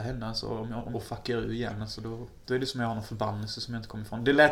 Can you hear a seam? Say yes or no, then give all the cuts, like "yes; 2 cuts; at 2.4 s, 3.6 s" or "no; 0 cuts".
yes; 2 cuts; at 0.9 s, 2.5 s